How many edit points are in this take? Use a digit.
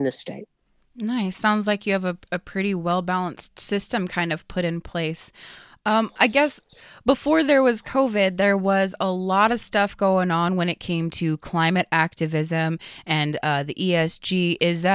0